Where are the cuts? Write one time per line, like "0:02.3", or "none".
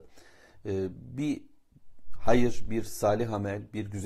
none